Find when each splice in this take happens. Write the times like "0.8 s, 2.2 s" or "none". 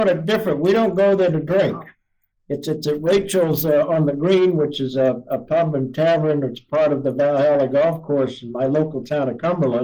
none